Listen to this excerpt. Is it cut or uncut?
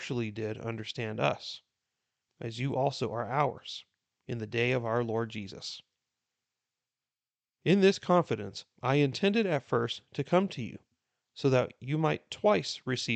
cut